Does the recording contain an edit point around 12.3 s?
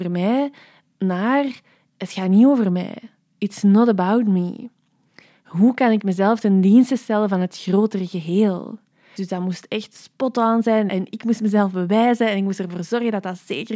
no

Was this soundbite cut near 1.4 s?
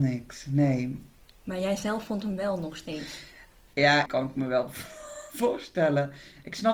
no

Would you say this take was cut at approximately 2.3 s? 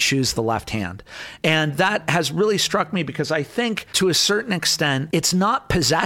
no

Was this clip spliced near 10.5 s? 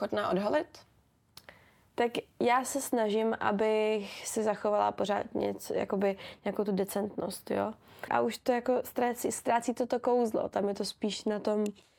no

